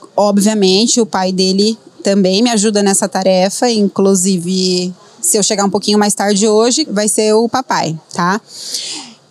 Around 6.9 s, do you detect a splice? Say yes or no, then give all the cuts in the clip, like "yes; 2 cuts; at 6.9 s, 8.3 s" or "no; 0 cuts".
yes; 1 cut; at 6.9 s